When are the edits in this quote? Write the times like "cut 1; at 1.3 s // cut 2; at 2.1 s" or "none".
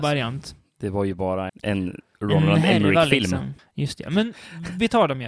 cut 1; at 1.5 s // cut 2; at 3.6 s